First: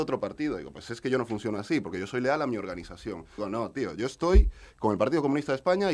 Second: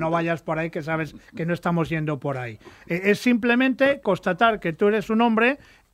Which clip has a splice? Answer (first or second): first